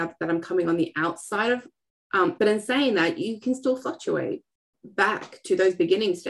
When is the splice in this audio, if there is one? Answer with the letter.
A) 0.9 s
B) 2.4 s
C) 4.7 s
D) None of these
B